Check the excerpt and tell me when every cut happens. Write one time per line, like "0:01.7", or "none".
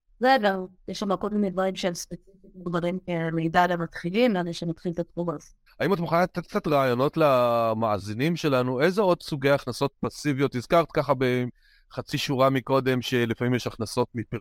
0:05.7